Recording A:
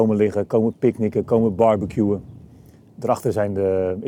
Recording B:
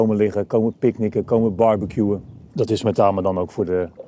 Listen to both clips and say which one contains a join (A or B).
B